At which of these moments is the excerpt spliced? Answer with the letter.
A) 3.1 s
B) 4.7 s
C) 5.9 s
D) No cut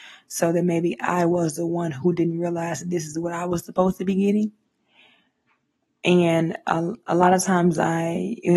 C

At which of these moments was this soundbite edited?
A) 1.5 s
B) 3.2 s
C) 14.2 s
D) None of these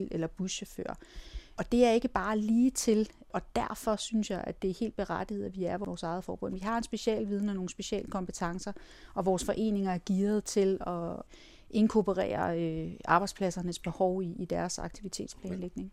D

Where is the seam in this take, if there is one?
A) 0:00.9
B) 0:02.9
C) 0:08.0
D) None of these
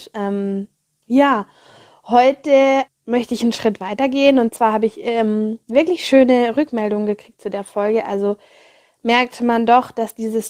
B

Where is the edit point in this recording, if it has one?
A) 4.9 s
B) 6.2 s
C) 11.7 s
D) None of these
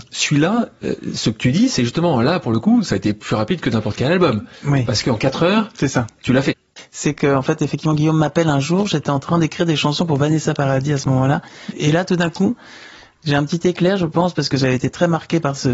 C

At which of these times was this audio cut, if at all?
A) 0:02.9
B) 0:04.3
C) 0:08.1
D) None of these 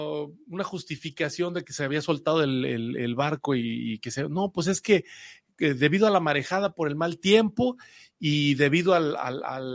D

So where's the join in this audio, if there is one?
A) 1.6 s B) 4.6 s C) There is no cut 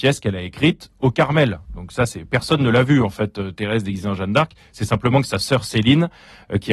C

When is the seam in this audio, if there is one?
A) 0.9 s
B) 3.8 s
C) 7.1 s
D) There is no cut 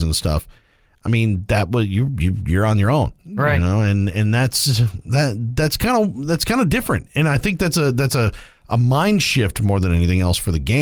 D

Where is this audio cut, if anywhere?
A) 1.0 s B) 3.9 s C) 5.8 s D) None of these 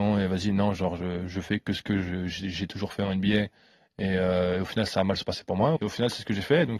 C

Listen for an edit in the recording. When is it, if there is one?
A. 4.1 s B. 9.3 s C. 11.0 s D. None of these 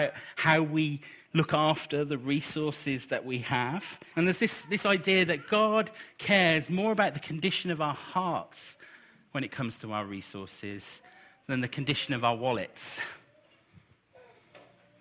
A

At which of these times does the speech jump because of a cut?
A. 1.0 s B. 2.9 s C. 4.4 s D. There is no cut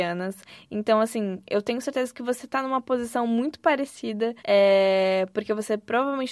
C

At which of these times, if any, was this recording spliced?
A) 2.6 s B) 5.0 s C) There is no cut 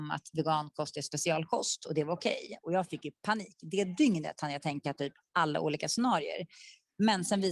A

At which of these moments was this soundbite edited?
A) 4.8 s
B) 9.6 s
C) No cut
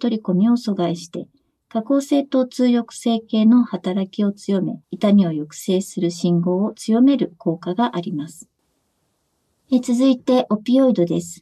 A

